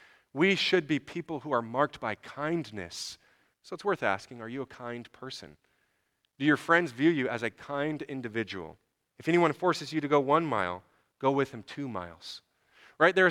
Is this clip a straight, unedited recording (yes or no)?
no